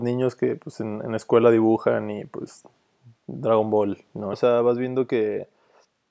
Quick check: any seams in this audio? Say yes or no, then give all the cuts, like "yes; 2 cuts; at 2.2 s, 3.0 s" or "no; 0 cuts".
yes; 1 cut; at 4.3 s